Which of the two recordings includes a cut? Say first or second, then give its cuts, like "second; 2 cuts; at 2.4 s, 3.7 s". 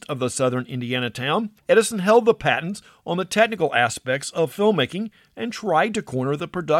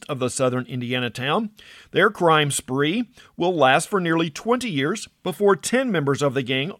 first; 1 cut; at 1.6 s